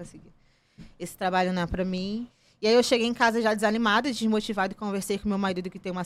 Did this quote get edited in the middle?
no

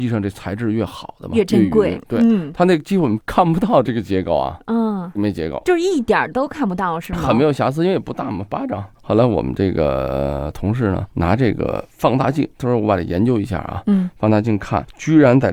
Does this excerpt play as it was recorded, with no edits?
no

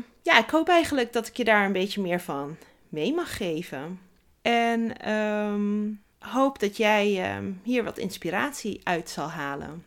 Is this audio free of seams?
no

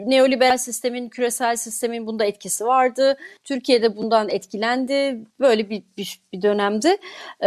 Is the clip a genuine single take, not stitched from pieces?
yes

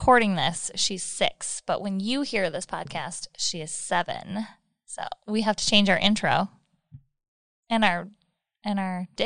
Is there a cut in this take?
no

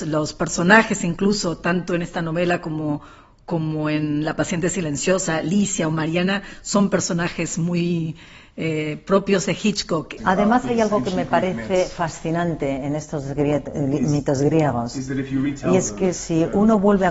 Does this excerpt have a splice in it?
yes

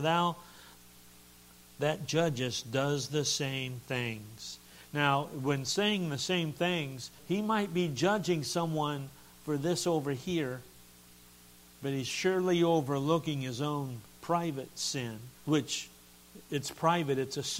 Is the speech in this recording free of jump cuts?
no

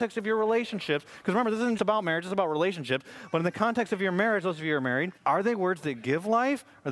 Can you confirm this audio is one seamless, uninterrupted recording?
no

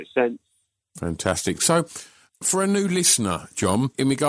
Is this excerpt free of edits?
yes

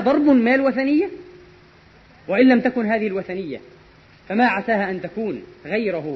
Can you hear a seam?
no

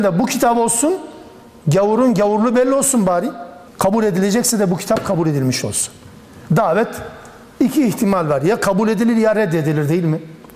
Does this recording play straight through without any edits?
no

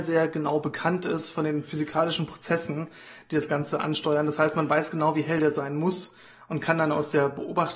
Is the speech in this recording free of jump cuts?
yes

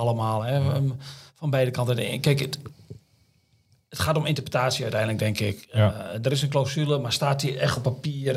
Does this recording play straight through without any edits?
yes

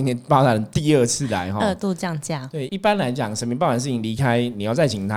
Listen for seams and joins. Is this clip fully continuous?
no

